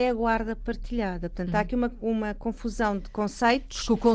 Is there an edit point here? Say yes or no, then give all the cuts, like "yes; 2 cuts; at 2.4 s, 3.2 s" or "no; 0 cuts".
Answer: no; 0 cuts